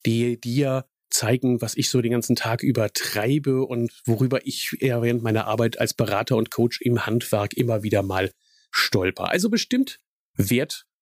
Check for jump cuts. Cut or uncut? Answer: uncut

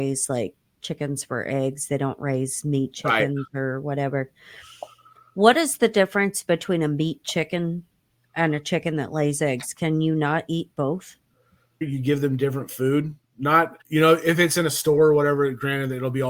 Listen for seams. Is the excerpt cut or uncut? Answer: cut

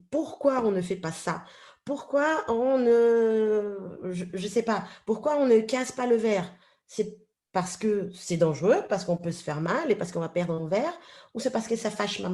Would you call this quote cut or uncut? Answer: uncut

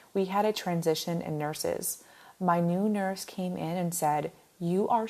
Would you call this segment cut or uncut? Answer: uncut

